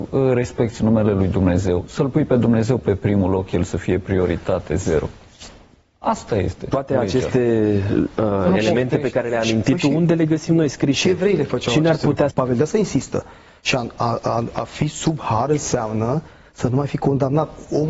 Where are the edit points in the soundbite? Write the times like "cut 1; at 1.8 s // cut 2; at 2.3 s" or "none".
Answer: cut 1; at 12.3 s